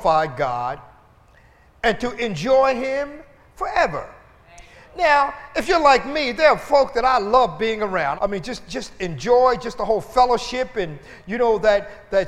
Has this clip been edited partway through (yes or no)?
yes